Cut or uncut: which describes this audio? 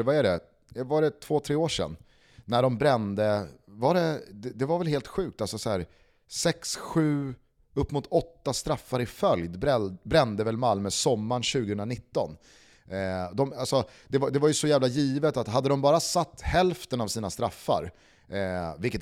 uncut